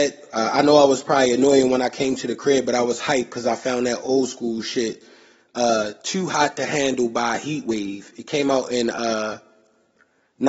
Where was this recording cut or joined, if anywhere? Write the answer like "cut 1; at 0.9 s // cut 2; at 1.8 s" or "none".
none